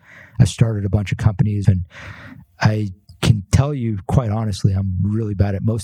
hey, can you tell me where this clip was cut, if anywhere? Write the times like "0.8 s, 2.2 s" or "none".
1.6 s